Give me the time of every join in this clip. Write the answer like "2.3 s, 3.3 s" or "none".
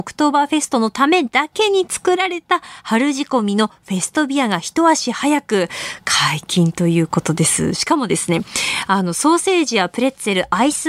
none